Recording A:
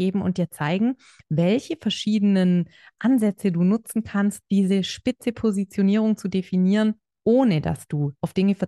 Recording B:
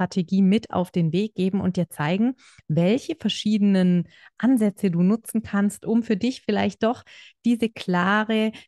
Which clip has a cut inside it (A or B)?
A